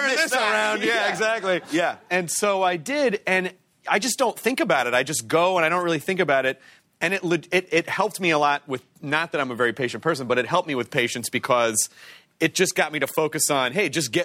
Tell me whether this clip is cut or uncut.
uncut